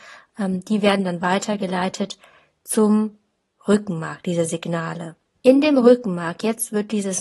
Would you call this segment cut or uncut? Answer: cut